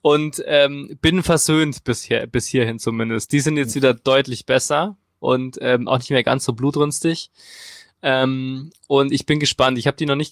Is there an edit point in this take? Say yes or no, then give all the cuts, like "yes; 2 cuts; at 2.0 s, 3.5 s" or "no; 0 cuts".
no; 0 cuts